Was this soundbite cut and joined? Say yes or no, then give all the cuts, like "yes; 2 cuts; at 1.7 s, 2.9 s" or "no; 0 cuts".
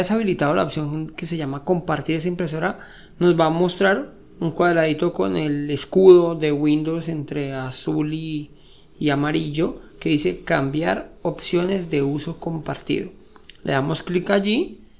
no; 0 cuts